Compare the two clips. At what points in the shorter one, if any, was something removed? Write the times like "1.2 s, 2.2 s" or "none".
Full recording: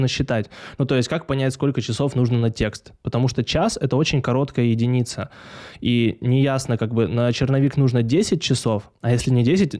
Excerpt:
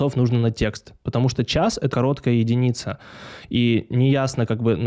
1.9 s

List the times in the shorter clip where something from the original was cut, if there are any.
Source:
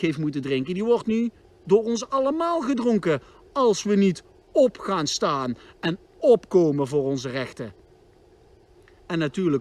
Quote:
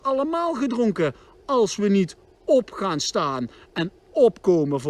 none

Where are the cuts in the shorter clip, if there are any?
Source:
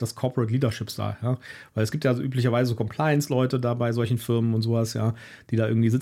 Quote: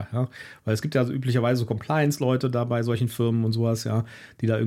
none

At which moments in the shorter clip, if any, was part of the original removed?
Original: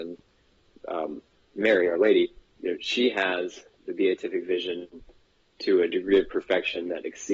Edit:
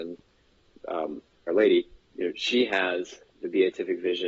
1.5 s

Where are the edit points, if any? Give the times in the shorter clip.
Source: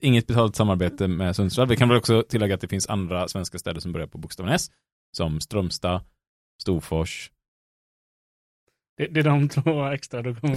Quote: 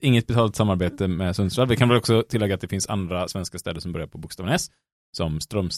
none

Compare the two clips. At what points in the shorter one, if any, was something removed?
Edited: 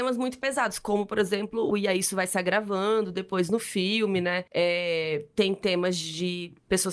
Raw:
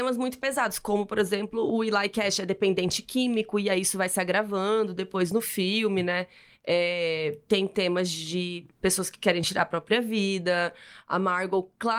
1.7 s, 4.5 s

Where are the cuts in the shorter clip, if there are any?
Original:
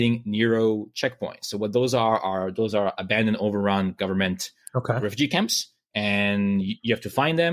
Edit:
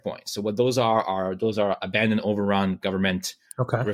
none

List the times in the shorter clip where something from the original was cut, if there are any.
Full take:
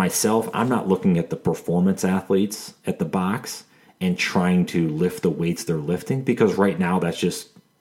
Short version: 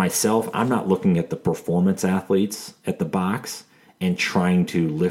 none

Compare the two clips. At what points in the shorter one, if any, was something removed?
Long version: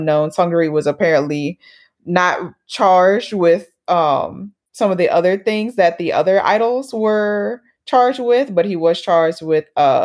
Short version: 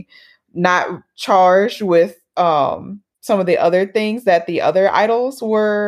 none

